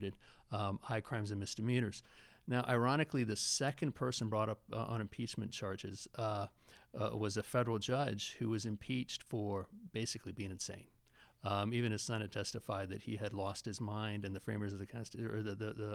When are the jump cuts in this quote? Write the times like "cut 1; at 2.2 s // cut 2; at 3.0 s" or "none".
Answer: none